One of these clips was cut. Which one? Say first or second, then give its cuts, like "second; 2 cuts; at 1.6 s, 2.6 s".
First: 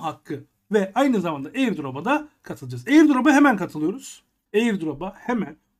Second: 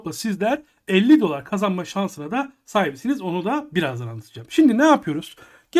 first; 1 cut; at 4.5 s